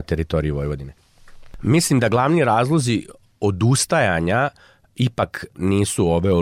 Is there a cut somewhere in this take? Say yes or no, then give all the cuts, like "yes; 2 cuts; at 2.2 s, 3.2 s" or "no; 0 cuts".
no; 0 cuts